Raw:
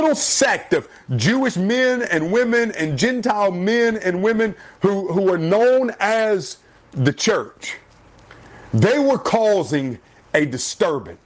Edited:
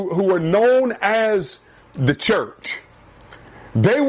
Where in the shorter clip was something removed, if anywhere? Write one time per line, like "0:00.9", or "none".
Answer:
none